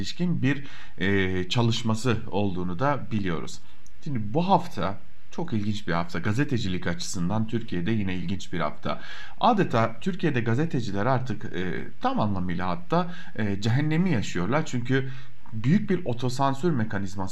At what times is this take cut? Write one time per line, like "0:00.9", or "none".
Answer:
none